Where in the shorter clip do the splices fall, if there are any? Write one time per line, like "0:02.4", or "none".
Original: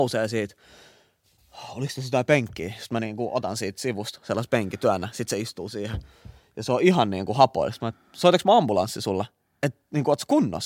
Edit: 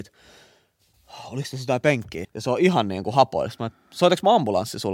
0:02.2